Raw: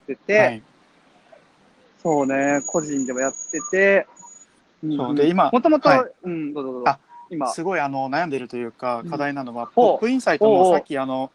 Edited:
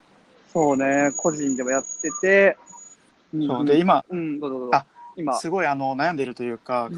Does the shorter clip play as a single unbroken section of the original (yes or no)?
no